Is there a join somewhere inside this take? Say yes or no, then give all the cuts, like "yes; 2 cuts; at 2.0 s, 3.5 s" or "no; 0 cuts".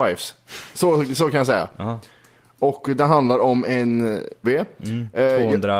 yes; 1 cut; at 4.4 s